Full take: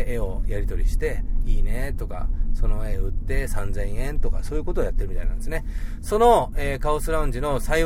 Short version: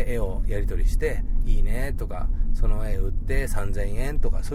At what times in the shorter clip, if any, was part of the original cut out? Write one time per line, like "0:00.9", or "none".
none

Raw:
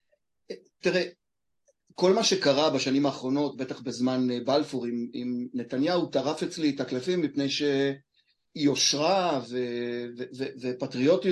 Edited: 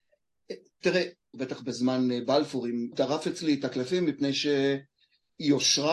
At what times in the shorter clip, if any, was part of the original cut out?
0:01.3
0:02.9

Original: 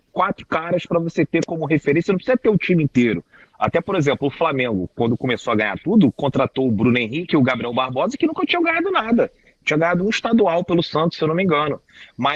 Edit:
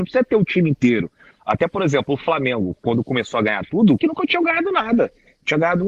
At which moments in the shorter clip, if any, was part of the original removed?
0:04.0

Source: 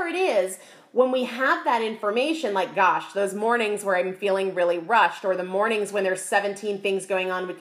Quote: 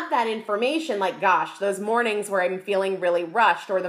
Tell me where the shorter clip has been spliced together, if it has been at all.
none

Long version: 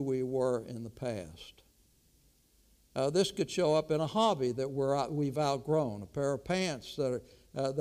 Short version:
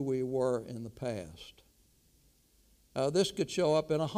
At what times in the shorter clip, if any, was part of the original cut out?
none

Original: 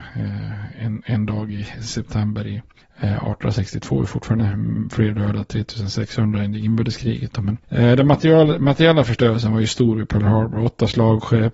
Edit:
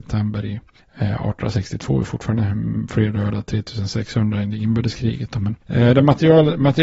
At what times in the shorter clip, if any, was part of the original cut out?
none

